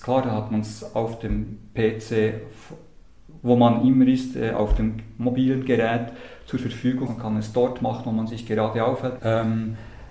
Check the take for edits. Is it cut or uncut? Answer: cut